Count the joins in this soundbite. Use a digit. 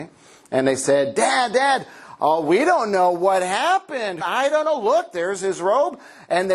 1